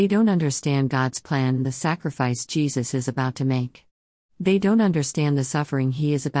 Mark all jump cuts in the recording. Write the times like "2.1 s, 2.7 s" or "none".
none